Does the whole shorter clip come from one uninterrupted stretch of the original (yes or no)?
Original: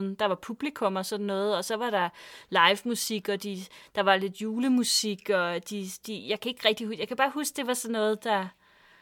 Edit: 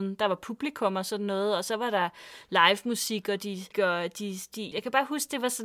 no